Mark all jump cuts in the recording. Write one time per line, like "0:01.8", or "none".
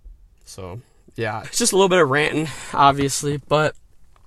0:01.4